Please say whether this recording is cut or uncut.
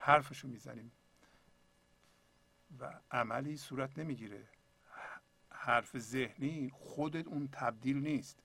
cut